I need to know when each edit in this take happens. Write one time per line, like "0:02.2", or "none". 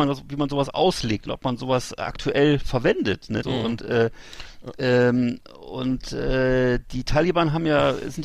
0:03.4